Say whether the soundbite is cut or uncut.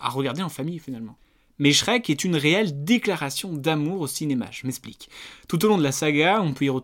uncut